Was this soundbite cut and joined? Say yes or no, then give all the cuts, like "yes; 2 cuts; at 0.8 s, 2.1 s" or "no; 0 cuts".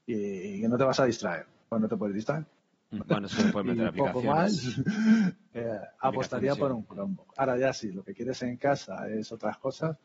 yes; 1 cut; at 3.0 s